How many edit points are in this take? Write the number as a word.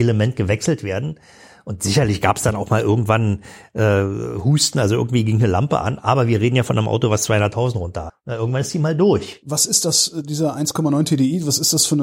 one